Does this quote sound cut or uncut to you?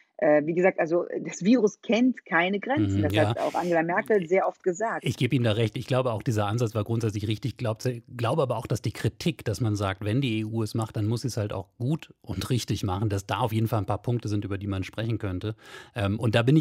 uncut